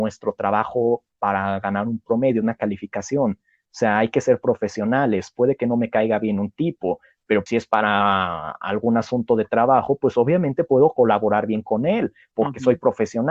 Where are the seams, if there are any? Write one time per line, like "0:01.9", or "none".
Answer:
0:07.5